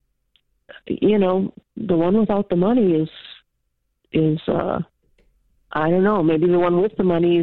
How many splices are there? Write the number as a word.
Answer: zero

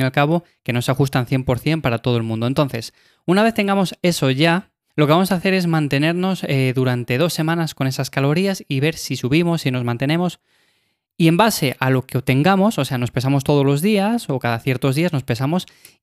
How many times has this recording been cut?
one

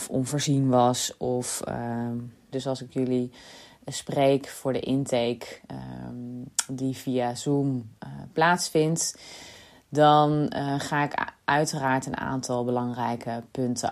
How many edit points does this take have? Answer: one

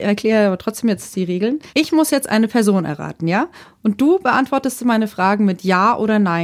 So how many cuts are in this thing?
one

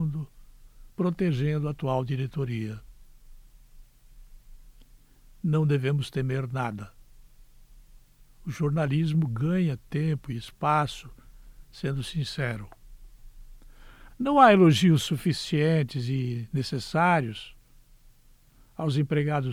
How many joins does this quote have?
two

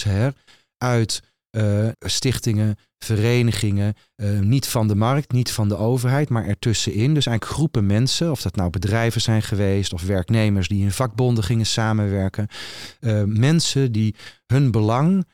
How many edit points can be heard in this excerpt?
one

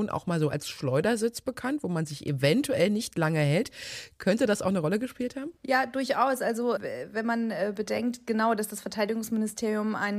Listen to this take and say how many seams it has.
two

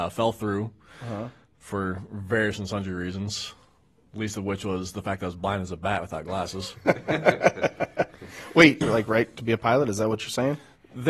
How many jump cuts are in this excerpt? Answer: one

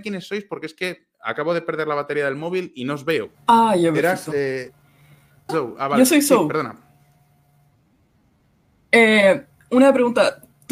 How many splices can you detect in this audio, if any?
two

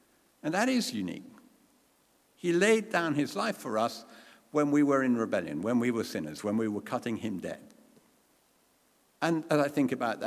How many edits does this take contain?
zero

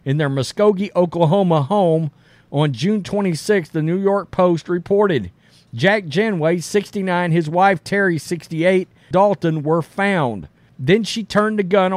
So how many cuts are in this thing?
two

